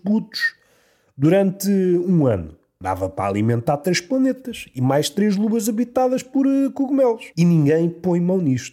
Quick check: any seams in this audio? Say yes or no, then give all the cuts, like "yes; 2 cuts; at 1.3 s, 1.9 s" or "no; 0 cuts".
yes; 1 cut; at 7.3 s